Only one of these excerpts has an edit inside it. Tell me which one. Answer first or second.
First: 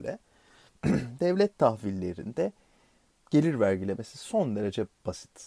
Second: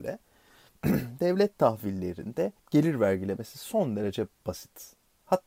second